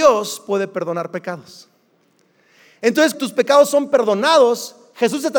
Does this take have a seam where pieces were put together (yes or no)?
yes